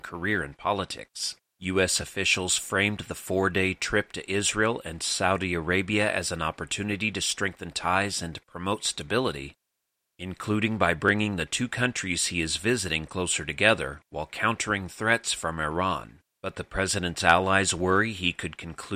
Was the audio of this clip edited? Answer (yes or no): no